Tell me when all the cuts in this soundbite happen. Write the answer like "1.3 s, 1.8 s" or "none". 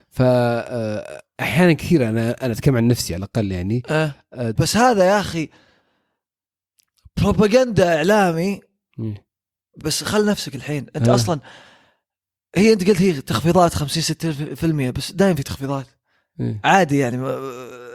4.6 s, 9.8 s